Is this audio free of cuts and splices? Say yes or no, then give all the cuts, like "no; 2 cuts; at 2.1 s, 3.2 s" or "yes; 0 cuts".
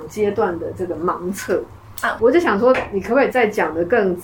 no; 1 cut; at 2.2 s